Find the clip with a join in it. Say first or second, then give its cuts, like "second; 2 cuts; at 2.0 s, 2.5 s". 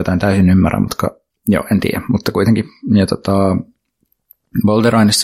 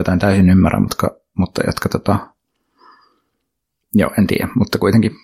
first; 1 cut; at 1.3 s